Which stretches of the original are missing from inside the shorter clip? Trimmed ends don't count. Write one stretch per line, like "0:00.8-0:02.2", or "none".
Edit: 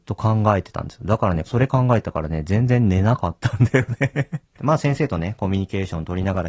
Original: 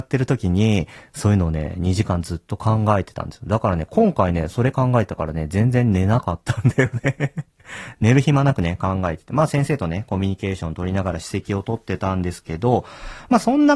0:03.9-0:04.5
0:07.6-0:09.3